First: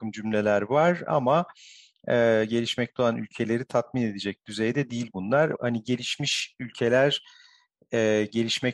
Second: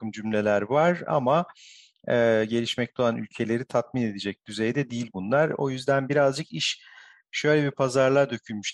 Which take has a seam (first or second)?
first